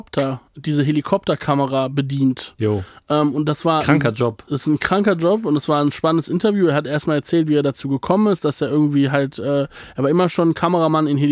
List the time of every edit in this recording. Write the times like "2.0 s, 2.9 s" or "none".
none